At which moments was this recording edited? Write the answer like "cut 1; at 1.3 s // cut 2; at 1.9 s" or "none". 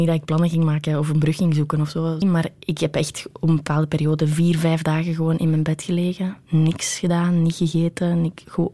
cut 1; at 2.2 s

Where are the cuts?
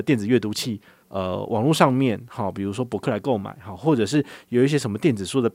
cut 1; at 1.0 s

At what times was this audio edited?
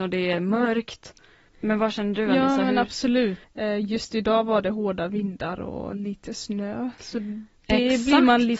cut 1; at 1.5 s // cut 2; at 3.4 s

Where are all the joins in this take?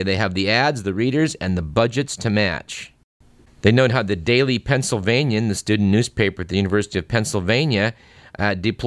none

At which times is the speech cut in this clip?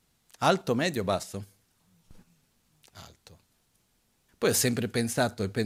cut 1; at 4.3 s

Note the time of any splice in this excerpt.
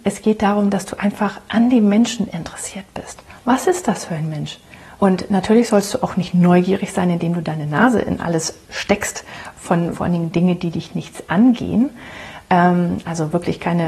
cut 1; at 5.0 s // cut 2; at 9.9 s

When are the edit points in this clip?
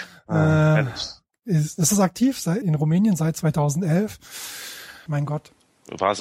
cut 1; at 2.6 s // cut 2; at 5.1 s

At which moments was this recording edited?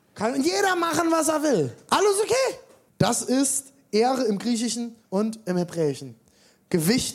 cut 1; at 2.9 s // cut 2; at 5.0 s

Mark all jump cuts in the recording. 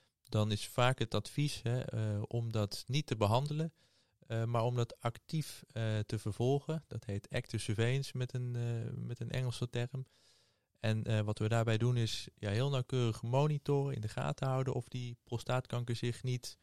none

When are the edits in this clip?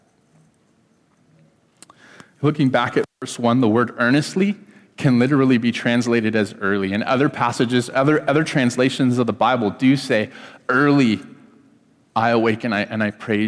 none

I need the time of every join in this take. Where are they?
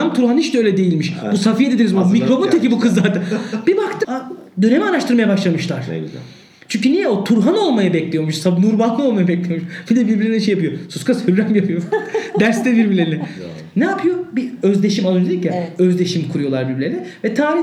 cut 1; at 4.0 s

